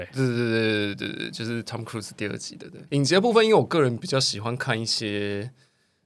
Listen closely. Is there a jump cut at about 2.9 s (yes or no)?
yes